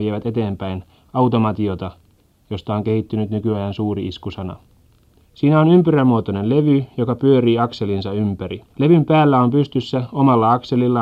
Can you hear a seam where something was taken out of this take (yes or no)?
yes